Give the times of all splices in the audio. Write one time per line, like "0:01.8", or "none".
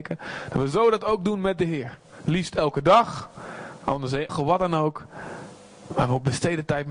0:04.3